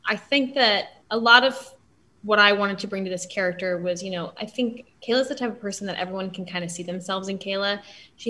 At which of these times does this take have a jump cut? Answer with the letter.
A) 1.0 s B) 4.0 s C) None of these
A